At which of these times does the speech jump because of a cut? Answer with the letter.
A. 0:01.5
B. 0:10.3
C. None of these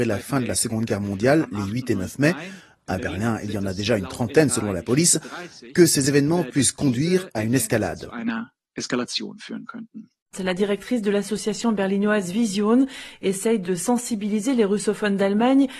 B